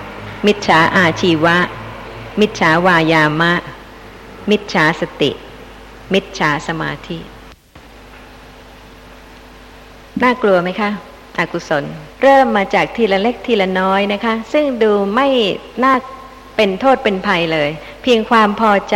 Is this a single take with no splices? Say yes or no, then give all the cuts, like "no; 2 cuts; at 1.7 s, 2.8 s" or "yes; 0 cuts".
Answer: no; 1 cut; at 12.1 s